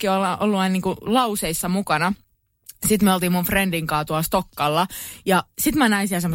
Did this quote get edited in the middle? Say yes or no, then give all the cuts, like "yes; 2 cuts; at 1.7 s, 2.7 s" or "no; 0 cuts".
no; 0 cuts